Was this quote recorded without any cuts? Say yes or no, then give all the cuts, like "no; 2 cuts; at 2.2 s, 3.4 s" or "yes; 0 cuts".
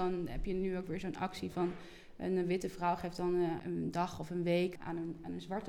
no; 2 cuts; at 3.6 s, 4.8 s